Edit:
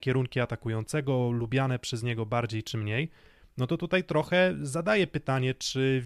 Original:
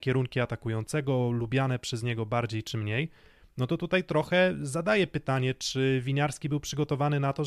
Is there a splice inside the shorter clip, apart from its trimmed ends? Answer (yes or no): no